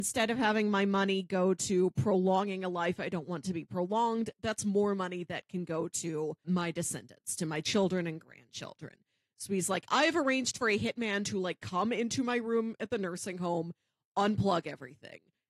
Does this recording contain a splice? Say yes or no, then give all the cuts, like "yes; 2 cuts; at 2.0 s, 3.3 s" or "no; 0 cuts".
yes; 1 cut; at 6.4 s